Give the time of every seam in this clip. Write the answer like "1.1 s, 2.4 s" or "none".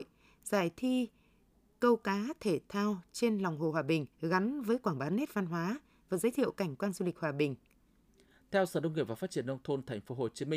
4.1 s